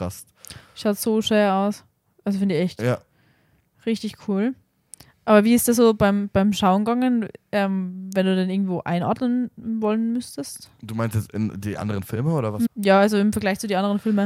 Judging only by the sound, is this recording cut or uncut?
cut